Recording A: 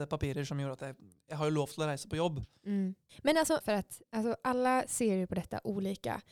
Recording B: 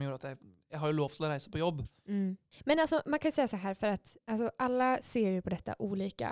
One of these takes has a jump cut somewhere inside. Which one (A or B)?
A